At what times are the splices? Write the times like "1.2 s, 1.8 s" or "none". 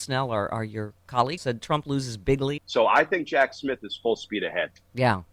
1.4 s, 2.6 s

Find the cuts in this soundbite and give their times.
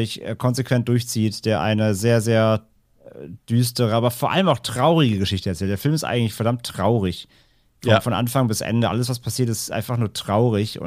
none

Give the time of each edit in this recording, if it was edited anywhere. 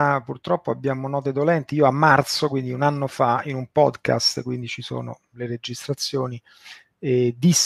none

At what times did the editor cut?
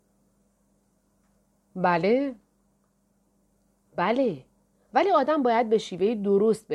3.9 s

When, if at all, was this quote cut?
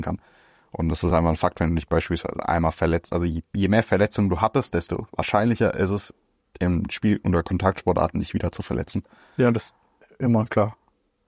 none

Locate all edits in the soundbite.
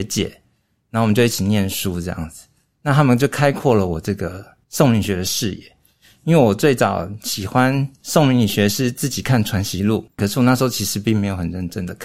10.2 s

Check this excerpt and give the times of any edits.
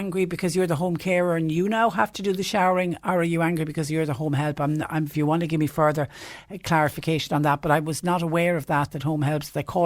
none

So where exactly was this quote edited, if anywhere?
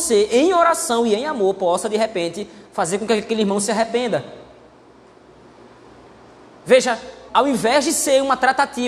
7.3 s

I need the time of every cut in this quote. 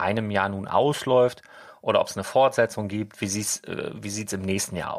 none

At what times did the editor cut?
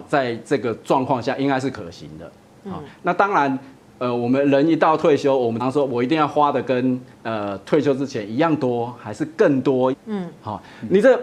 5.6 s, 7.1 s, 9.9 s

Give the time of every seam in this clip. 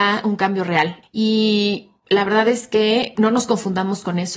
1.0 s, 3.2 s

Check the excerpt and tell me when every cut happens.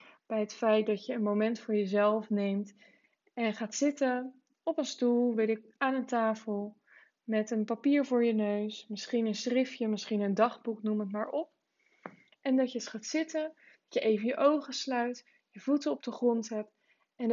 none

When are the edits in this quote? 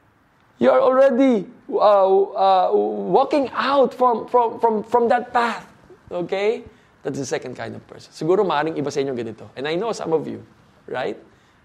none

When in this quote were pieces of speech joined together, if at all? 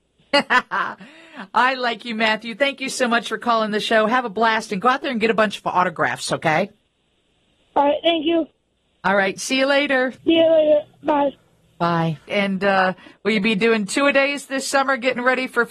10.2 s, 12.3 s

